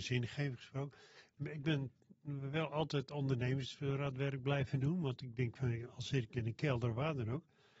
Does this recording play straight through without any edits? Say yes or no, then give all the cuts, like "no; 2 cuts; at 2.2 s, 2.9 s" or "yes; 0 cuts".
yes; 0 cuts